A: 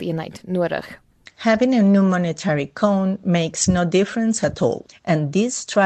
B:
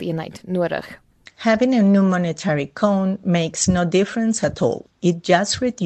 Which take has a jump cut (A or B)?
A